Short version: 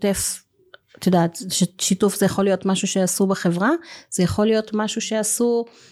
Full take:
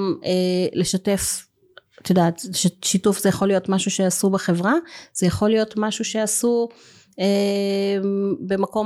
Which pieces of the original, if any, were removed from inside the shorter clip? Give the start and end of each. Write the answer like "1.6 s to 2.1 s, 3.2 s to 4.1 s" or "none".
none